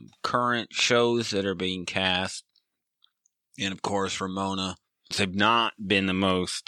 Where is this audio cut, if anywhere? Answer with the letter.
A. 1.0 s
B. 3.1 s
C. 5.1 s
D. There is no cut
C